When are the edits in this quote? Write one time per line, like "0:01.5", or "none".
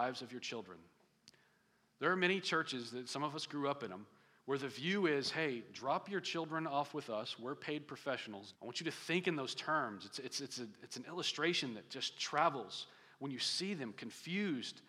0:08.5